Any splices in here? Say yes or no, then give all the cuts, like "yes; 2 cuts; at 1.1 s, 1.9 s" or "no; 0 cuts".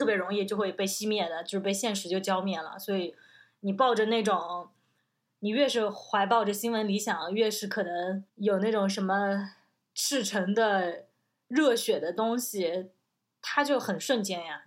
yes; 1 cut; at 8.3 s